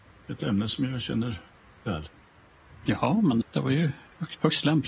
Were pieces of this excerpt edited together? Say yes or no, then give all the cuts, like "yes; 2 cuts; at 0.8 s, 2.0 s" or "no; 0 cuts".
yes; 1 cut; at 3.4 s